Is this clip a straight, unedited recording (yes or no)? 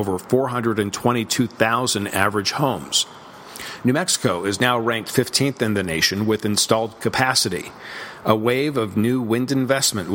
yes